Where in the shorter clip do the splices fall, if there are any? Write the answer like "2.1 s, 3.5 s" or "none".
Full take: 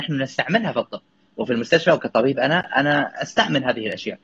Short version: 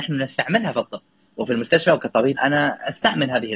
2.3 s